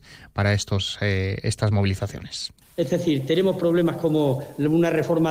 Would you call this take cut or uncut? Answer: uncut